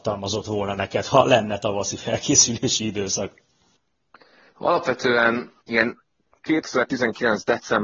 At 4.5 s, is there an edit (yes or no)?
yes